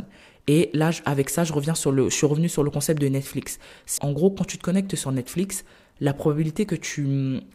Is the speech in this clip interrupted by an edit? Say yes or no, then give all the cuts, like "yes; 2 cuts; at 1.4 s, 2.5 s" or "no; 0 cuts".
yes; 1 cut; at 4.0 s